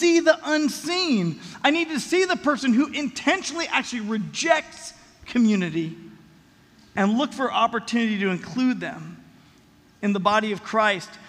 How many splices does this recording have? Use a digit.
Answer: 0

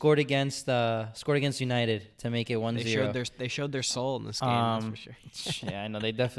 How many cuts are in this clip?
0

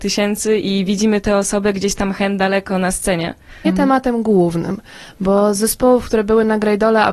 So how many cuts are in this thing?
1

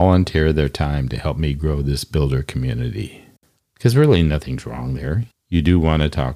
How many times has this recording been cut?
2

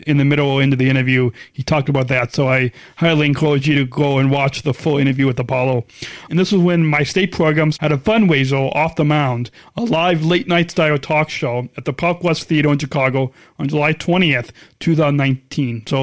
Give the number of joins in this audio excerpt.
2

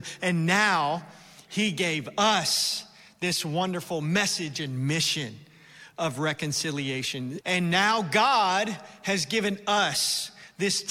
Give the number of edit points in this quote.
1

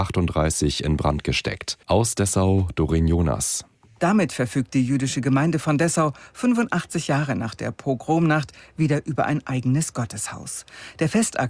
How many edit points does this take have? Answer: 1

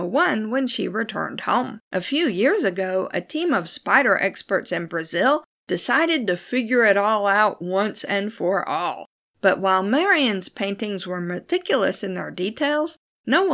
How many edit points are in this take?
2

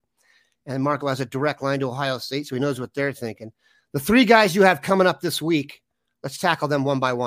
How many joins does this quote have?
1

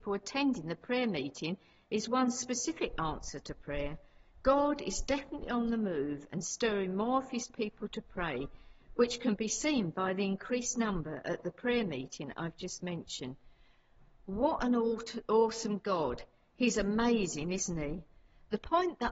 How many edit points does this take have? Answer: 0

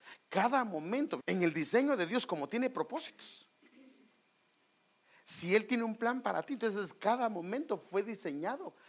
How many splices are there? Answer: 1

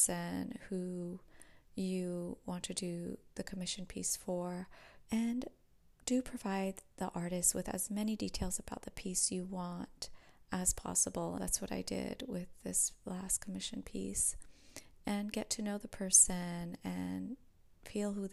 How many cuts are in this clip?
2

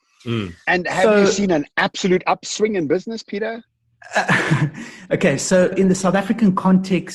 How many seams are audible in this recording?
1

